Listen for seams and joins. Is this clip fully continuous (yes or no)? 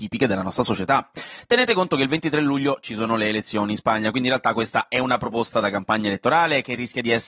yes